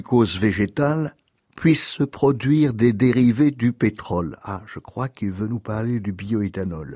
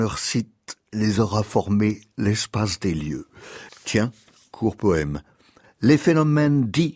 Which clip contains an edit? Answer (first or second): second